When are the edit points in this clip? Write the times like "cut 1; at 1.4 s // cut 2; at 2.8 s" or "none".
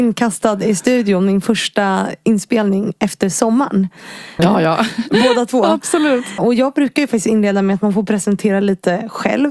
cut 1; at 4.4 s // cut 2; at 6.4 s